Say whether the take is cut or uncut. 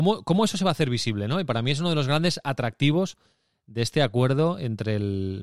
uncut